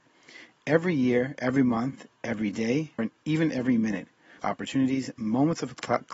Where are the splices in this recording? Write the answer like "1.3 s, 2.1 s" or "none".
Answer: 3.0 s, 4.4 s